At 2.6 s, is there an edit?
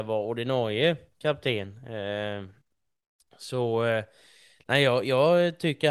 no; 0 cuts

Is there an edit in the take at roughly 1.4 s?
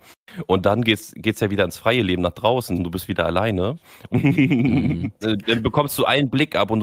no; 3 cuts; at 2.8 s, 4.1 s, 5.2 s

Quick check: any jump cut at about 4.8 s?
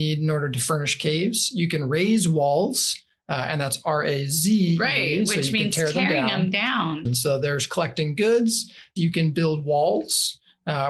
no; 2 cuts; at 7.1 s, 9.0 s

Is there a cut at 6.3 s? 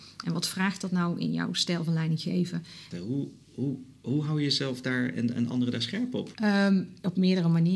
yes; 2 cuts; at 2.9 s, 6.3 s

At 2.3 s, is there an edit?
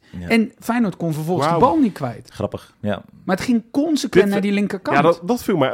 no; 0 cuts

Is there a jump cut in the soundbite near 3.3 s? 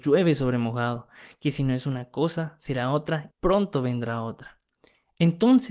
yes; 1 cut; at 3.3 s

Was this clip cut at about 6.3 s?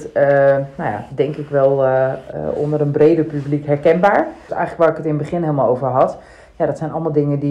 no; 1 cut; at 4.5 s

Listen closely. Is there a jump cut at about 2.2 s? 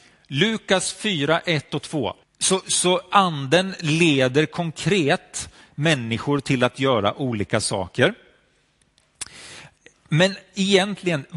yes; 1 cut; at 2.2 s

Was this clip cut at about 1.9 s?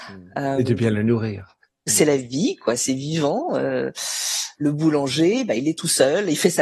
yes; 2 cuts; at 1.9 s, 4.5 s

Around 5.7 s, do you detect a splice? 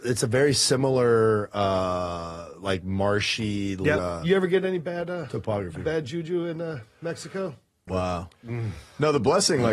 no; 2 cuts; at 4.0 s, 7.9 s

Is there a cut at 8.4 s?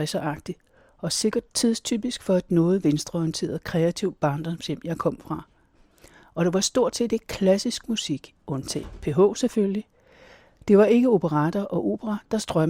yes; 1 cut; at 8.4 s

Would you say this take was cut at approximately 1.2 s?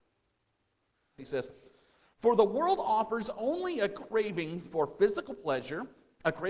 yes; 1 cut; at 1.2 s

